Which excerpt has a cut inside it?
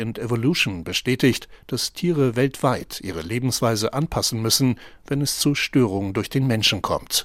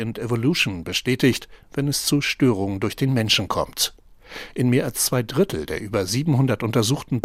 second; 1 cut; at 1.6 s

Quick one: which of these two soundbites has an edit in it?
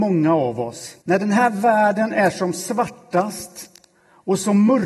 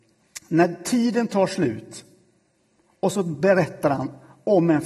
first; 1 cut; at 1.0 s

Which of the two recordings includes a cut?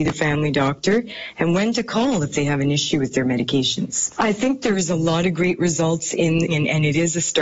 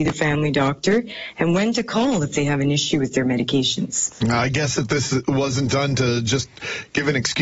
first; 2 cuts; at 4.1 s, 6.5 s

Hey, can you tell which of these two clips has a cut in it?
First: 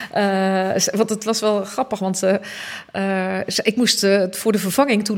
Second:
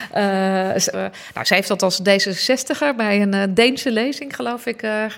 second; 1 cut; at 0.9 s

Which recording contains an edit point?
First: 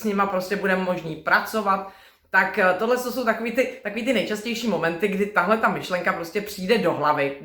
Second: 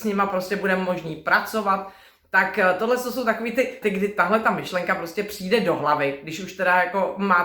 second; 1 cut; at 3.8 s

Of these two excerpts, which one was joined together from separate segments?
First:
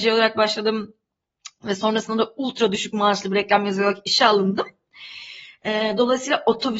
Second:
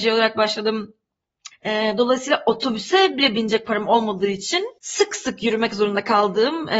second; 2 cuts; at 1.5 s, 4.8 s

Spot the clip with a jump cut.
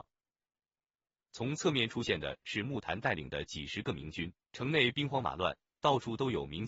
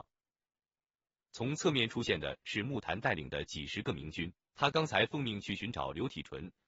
first; 1 cut; at 4.4 s

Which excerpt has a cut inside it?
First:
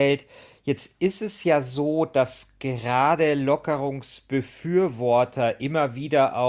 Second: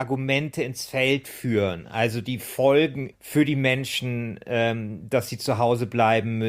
second; 1 cut; at 3.1 s

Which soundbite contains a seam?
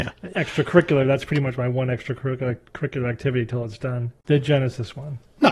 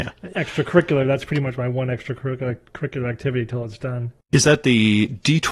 first; 1 cut; at 4.2 s

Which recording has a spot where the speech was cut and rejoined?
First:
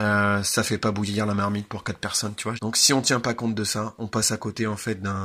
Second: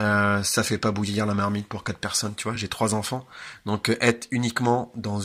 first; 1 cut; at 2.6 s

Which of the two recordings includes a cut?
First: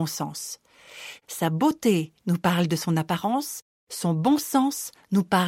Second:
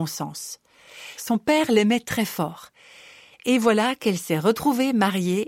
second; 1 cut; at 1.2 s

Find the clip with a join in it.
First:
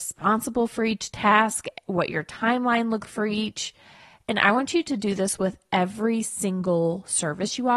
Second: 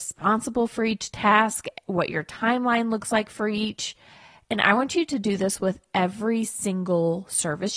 first; 1 cut; at 3.0 s

